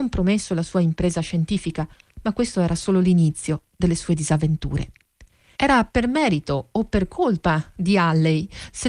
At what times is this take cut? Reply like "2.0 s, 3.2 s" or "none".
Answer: 5.5 s

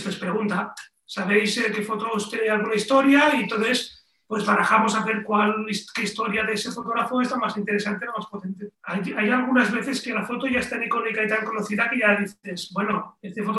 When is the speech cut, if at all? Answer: 8.7 s

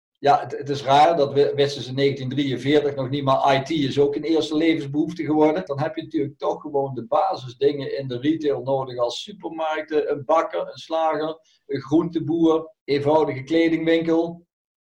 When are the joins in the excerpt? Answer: 5.7 s, 12.8 s

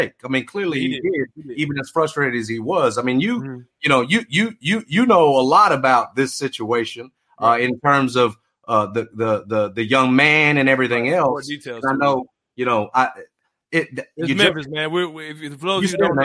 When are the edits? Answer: none

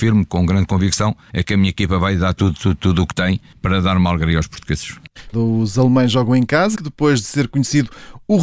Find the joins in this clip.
5.3 s, 6.7 s

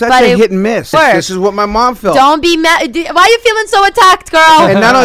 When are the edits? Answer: 0.9 s

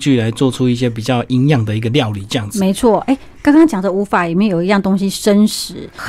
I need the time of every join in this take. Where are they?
none

